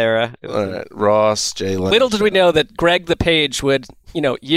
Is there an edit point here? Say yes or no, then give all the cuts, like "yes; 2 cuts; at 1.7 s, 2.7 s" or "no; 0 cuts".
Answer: no; 0 cuts